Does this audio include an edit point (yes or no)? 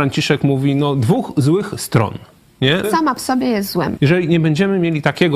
yes